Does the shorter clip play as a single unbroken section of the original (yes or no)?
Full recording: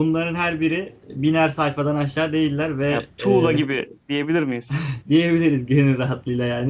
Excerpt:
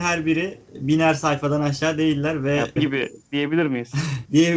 no